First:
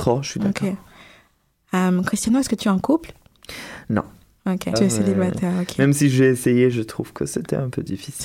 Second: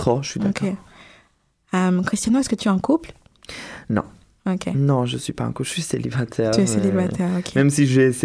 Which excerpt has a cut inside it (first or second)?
first